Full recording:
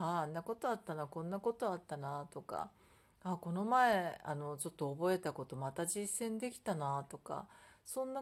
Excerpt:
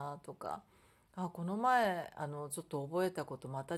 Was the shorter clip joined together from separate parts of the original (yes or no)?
no